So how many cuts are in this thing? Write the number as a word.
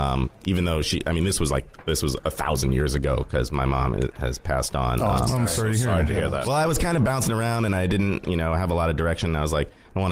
one